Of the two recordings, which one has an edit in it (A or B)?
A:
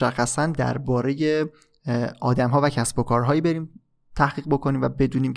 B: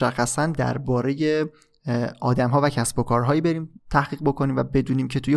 B